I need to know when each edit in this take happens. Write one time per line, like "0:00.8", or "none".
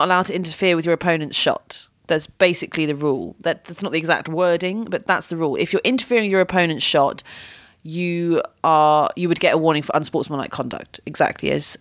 none